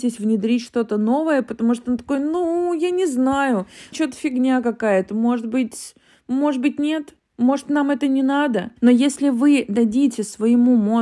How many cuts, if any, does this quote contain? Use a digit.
1